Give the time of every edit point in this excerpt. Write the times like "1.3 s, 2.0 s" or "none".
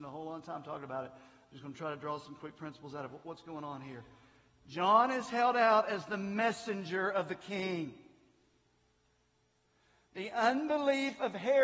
none